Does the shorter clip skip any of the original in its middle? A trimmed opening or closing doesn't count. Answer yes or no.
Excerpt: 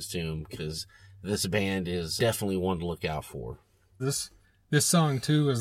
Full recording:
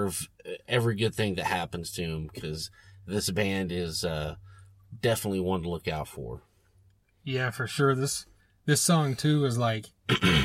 yes